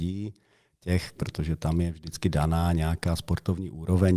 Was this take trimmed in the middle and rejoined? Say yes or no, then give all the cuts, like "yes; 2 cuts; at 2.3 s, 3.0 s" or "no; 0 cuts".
yes; 1 cut; at 1.1 s